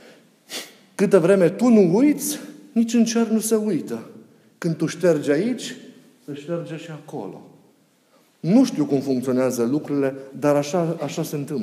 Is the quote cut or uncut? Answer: uncut